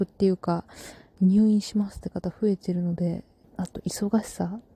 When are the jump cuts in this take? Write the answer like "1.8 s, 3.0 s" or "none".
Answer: 3.4 s